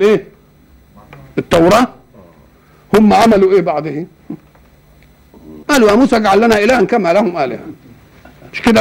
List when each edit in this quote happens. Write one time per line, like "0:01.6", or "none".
0:05.6